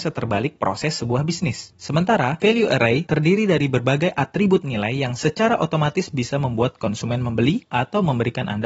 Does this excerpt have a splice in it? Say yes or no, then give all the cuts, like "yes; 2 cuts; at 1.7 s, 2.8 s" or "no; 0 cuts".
no; 0 cuts